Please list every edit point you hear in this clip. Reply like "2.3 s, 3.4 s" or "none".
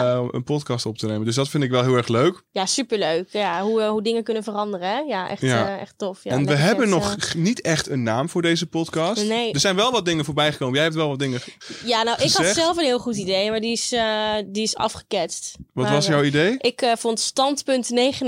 none